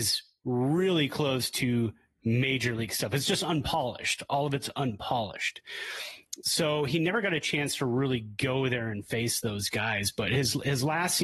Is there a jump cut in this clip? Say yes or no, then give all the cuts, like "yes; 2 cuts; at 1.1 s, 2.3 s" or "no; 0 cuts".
no; 0 cuts